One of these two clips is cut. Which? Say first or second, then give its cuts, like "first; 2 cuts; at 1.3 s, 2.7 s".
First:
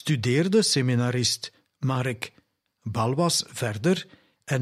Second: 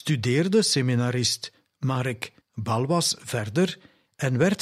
second; 1 cut; at 2.4 s